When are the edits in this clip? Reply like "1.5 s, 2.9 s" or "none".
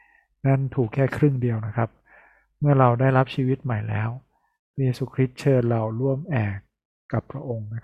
none